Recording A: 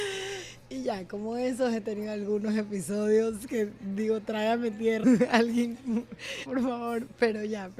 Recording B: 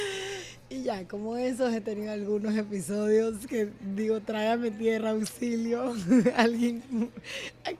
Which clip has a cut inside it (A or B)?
A